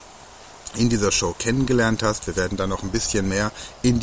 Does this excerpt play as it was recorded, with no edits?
yes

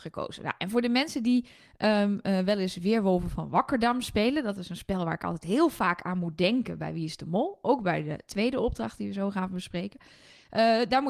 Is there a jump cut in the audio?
no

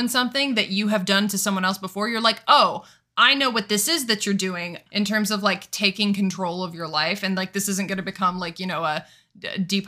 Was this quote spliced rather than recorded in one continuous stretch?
yes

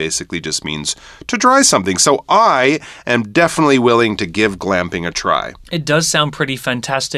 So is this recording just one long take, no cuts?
no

